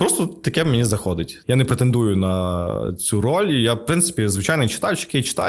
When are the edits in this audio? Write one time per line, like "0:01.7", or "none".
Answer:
0:01.4